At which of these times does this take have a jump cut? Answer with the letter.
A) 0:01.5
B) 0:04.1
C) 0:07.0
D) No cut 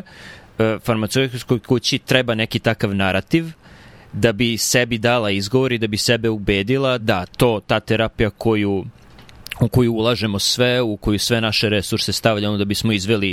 C